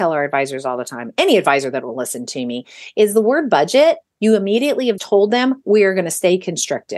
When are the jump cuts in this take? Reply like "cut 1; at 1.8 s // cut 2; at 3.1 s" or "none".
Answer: cut 1; at 5.0 s